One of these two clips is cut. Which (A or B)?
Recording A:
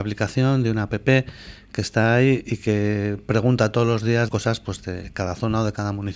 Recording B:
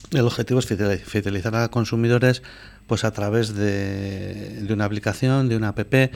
A